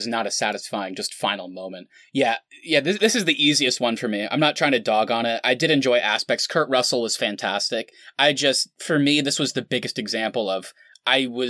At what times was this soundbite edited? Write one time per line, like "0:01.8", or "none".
none